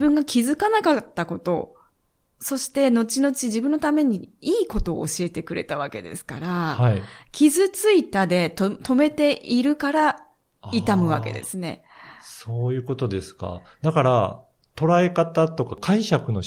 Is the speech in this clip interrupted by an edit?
no; 0 cuts

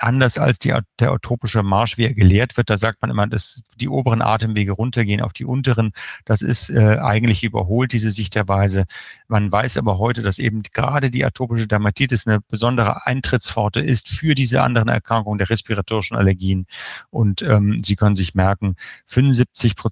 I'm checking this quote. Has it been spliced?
no; 0 cuts

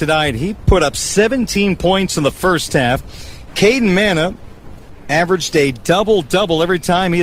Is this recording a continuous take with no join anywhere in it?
no; 1 cut; at 3.5 s

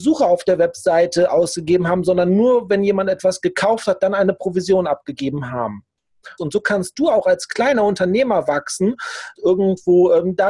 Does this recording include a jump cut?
yes; 2 cuts; at 6.4 s, 9.4 s

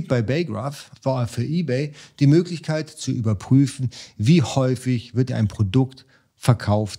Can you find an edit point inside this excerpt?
yes; 2 cuts; at 1.0 s, 5.3 s

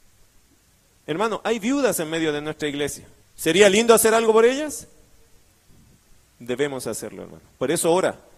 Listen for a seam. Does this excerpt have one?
yes; 1 cut; at 3.2 s

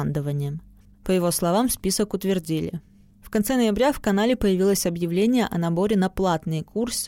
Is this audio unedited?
no; 1 cut; at 0.9 s

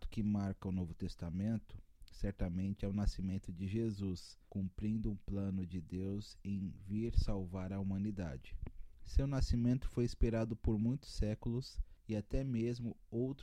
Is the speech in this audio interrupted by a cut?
no; 0 cuts

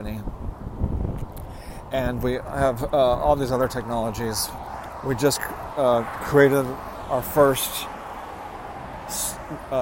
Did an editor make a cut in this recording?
no; 0 cuts

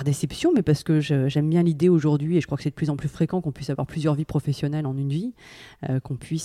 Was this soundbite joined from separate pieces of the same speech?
no; 0 cuts

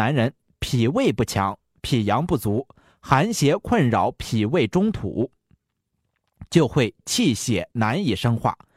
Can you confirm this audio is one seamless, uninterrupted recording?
yes; 0 cuts

